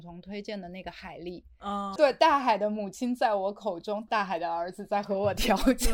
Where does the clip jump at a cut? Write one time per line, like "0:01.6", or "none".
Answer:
0:02.0
0:04.1

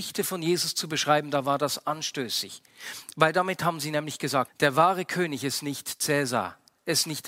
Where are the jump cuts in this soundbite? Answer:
0:04.5

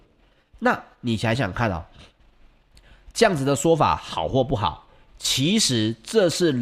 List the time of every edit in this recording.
0:01.4

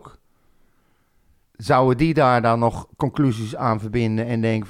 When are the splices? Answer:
none

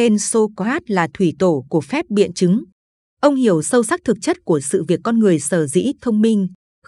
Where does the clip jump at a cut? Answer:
none

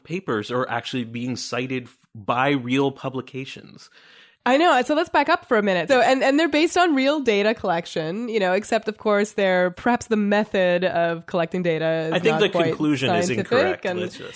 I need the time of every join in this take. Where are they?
0:04.3
0:05.9
0:09.7

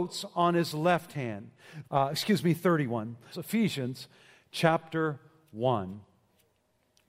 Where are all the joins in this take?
0:01.8
0:03.3

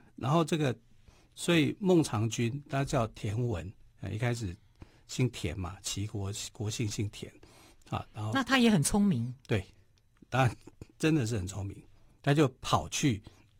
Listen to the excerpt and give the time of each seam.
0:07.7

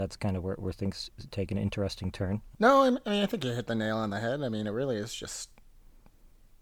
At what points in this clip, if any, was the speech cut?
0:02.5

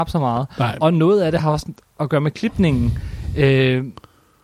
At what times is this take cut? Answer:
none

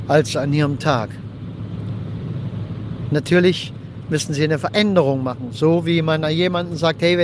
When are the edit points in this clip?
0:03.1

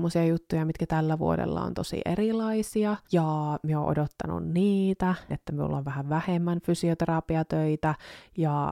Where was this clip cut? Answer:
0:03.0
0:05.3

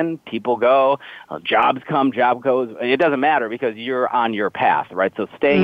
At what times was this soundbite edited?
none

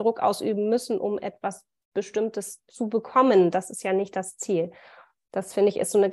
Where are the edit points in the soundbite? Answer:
none

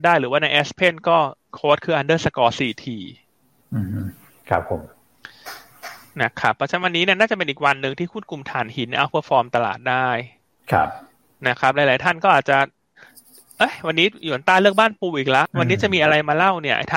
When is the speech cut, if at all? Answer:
0:15.5

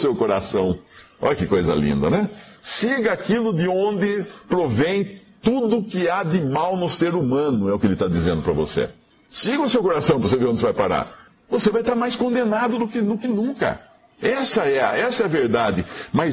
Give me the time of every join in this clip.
0:02.6

